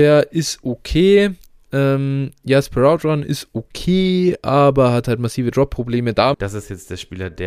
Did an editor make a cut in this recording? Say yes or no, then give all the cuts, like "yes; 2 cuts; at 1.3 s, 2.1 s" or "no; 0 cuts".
yes; 1 cut; at 6.3 s